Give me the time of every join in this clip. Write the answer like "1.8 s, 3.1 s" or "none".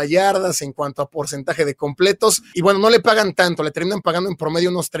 2.5 s